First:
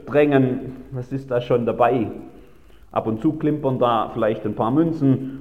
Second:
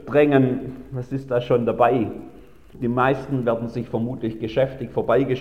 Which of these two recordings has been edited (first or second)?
second